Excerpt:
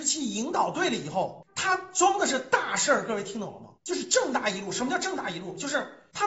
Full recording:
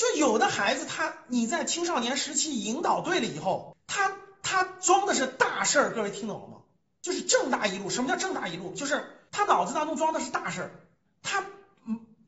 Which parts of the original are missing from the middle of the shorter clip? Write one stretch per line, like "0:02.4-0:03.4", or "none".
0:03.8-0:04.4
0:06.6-0:06.9